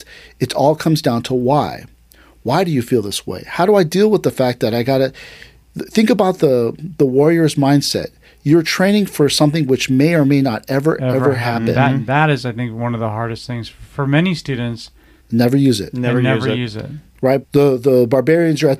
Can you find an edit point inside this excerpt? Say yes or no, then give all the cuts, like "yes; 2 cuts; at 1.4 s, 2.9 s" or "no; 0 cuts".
yes; 2 cuts; at 15.2 s, 17.4 s